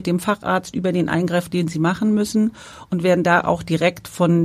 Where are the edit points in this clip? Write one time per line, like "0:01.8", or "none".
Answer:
none